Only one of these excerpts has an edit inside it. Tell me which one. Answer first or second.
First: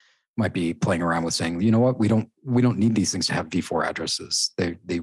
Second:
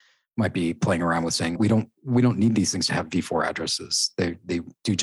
second